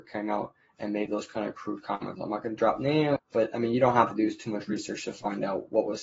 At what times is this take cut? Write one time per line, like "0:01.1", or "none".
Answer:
0:03.2